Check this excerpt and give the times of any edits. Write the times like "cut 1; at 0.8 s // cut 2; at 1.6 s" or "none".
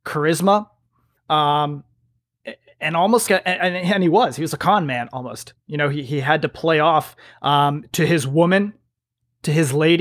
cut 1; at 3.3 s